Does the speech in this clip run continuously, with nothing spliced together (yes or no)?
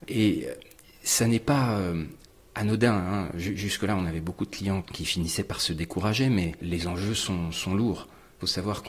yes